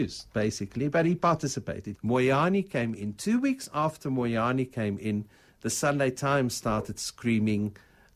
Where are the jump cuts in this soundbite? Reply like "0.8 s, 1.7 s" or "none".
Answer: 2.0 s